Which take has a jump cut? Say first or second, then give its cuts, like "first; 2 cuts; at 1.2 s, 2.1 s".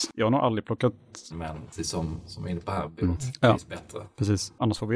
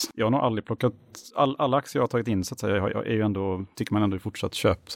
first; 2 cuts; at 1.3 s, 3.2 s